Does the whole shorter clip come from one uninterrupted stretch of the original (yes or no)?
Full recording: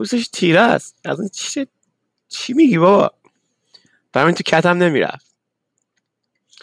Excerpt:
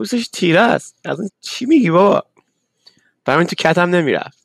no